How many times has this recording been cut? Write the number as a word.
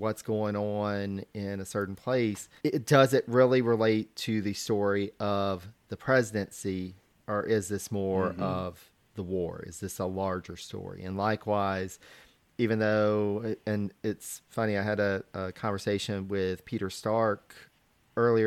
one